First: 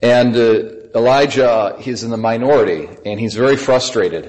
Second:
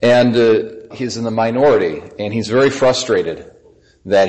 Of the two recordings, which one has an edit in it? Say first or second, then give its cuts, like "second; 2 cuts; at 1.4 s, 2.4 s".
second; 1 cut; at 0.9 s